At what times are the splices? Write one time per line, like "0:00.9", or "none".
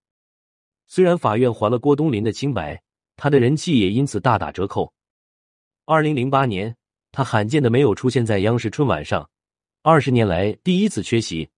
0:03.0